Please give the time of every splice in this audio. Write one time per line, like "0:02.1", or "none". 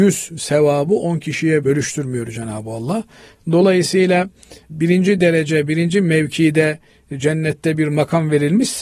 0:03.4